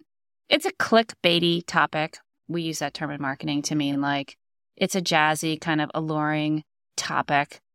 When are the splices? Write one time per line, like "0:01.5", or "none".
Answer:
none